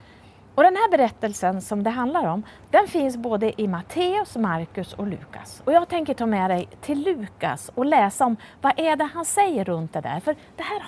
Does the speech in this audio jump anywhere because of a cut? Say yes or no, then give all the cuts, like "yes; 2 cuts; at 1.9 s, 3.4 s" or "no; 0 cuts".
no; 0 cuts